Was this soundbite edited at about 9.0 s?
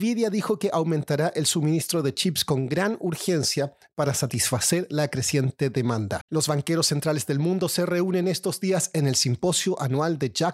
no; 1 cut; at 6.2 s

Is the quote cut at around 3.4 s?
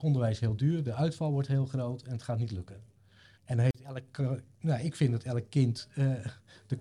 yes; 1 cut; at 3.4 s

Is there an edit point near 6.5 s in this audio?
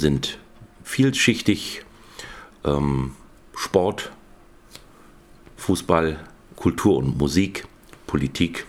yes; 1 cut; at 6.5 s

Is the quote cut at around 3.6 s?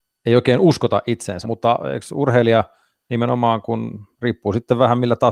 no; 1 cut; at 1.4 s

